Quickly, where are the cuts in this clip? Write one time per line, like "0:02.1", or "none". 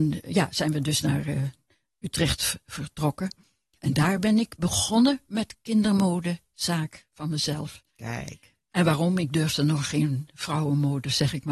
0:03.8